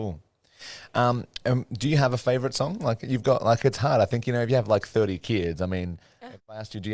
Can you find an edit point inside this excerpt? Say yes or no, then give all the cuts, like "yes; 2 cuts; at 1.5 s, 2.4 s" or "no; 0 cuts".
no; 0 cuts